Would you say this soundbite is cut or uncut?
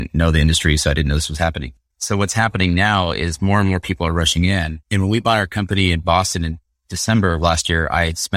cut